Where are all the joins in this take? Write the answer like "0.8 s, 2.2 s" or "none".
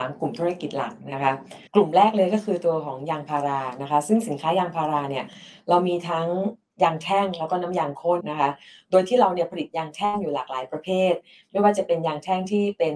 1.7 s, 8.2 s